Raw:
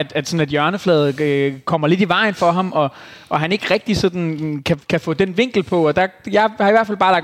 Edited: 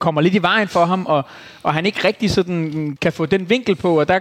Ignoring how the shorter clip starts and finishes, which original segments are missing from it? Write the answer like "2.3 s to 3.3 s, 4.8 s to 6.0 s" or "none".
4.6 s to 4.8 s

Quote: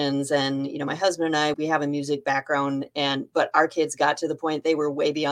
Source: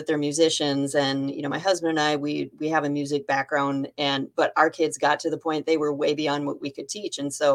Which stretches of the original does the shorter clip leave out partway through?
2.2 s to 2.6 s

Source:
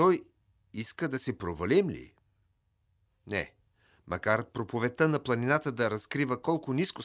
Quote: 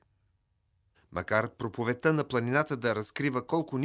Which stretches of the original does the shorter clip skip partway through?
3.1 s to 3.9 s

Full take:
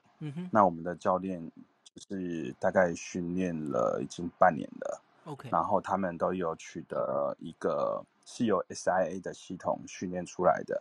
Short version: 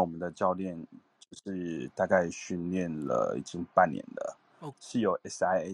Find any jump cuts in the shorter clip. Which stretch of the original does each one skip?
5.4 s to 8.2 s

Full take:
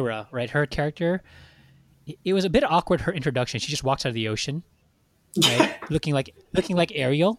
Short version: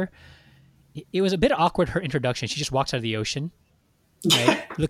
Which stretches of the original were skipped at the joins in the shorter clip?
none

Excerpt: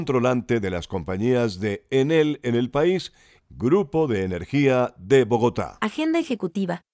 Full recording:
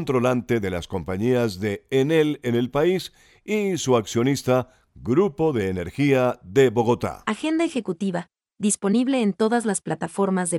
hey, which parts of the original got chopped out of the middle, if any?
3.4 s to 4.8 s

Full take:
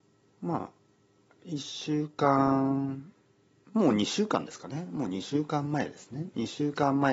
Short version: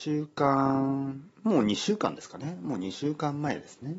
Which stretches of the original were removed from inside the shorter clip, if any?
3.2 s to 3.6 s

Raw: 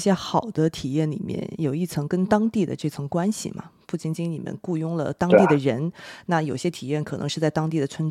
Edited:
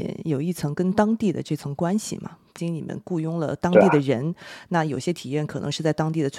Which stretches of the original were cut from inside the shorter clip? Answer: 3.9 s to 4.2 s

